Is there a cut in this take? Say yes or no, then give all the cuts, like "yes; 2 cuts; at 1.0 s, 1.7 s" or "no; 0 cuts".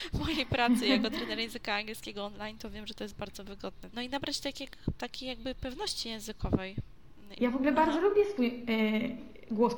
yes; 2 cuts; at 3.9 s, 7.4 s